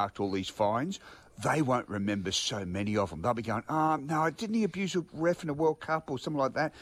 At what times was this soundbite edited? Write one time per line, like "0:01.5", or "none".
none